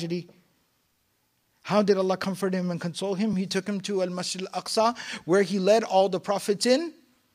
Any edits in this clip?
no; 0 cuts

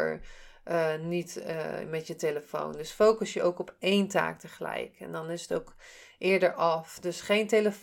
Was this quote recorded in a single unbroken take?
yes; 0 cuts

